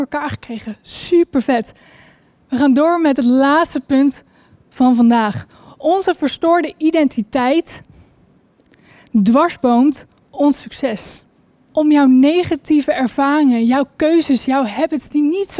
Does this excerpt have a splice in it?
yes; 1 cut; at 11.7 s

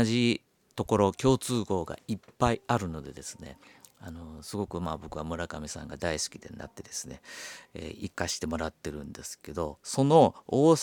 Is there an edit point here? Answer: no; 0 cuts

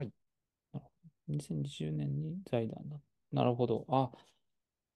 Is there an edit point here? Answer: no; 0 cuts

